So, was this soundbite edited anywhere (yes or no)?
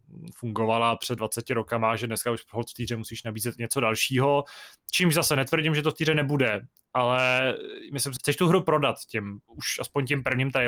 yes